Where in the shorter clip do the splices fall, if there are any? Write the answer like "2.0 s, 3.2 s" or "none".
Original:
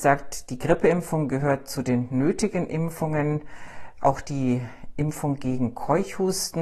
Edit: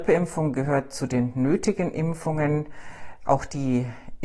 none

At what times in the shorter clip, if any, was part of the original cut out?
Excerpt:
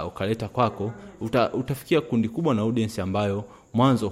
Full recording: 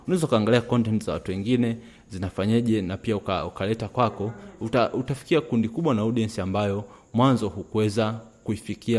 none

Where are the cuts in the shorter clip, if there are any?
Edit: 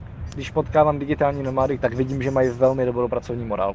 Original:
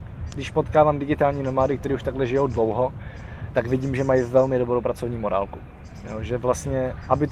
1.8 s

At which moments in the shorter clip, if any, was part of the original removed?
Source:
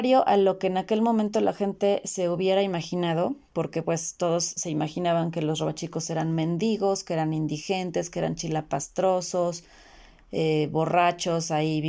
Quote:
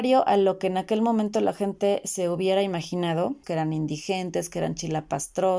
3.4 s

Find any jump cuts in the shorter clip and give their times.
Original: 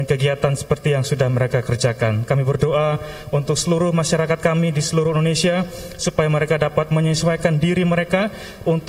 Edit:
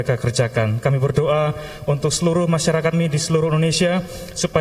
2.9 s

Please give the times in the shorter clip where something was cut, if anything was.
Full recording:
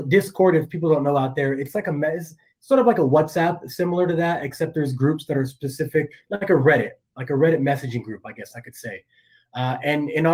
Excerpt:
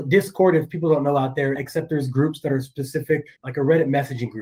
1.6 s, 3.4 s

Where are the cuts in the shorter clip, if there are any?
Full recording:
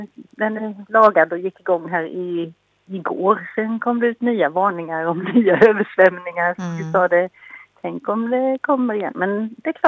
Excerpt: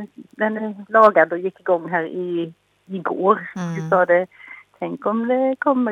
3.5 s

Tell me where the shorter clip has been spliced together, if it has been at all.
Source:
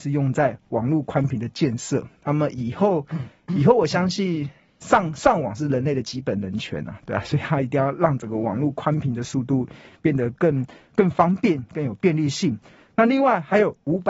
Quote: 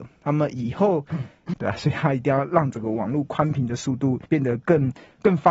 1.5 s, 4.3 s

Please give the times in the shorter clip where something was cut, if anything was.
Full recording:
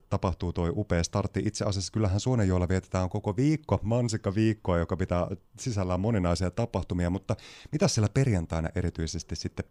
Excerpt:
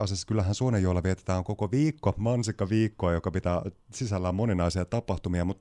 none

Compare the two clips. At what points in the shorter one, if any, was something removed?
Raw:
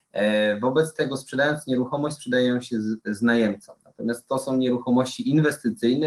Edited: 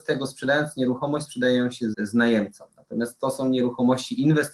1.9 s

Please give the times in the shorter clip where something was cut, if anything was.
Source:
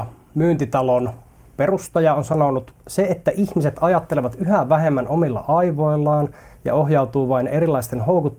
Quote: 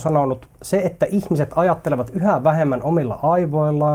none

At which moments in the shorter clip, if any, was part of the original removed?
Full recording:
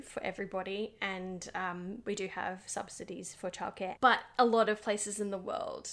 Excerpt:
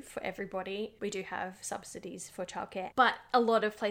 1.0 s

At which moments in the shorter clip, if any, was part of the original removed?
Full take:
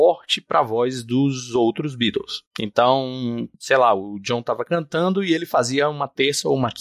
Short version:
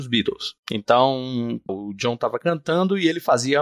1.7 s

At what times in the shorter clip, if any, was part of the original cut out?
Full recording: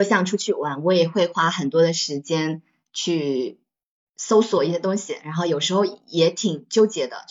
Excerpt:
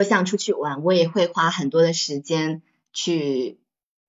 none

